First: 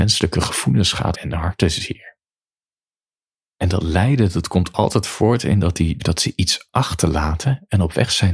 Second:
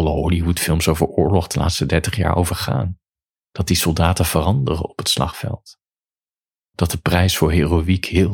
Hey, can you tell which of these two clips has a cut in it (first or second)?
first